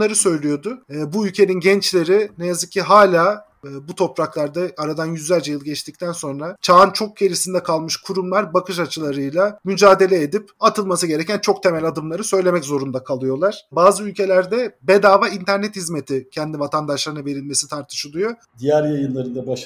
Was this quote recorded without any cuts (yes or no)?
no